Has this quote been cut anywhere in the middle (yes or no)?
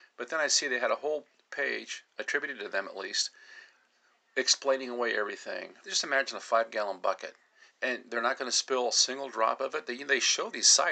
yes